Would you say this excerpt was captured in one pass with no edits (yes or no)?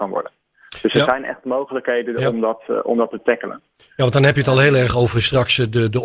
yes